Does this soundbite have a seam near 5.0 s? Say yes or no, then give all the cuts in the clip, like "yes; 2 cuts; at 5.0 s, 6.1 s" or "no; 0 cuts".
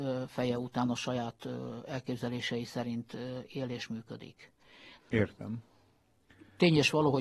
yes; 1 cut; at 5.0 s